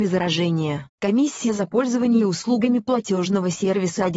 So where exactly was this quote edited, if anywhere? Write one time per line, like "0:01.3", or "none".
0:00.9